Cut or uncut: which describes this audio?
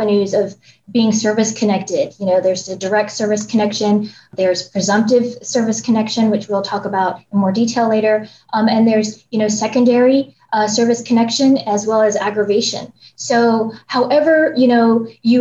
uncut